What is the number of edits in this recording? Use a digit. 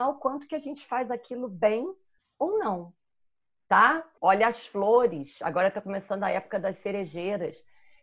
1